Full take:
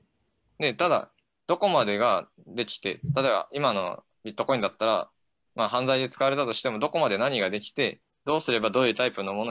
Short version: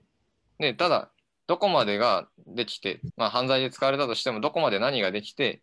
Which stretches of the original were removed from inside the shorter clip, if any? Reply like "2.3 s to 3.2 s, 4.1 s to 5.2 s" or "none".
3.1 s to 5.4 s